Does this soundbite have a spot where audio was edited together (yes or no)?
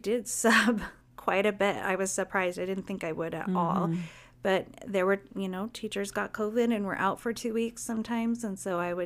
no